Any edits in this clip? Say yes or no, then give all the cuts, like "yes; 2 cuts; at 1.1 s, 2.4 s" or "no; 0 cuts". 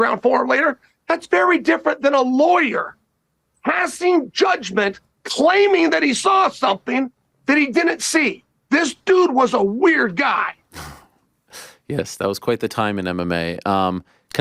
no; 0 cuts